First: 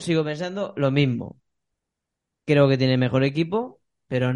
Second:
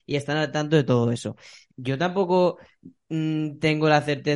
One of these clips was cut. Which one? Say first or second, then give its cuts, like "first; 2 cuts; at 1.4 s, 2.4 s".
second; 1 cut; at 1.7 s